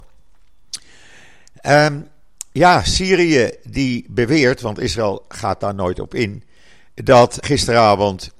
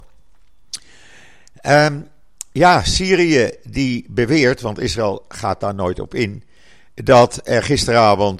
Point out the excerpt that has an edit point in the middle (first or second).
first